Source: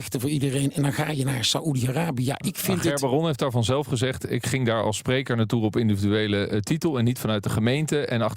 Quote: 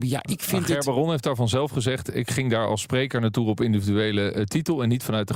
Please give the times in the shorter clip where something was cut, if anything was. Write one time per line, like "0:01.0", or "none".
none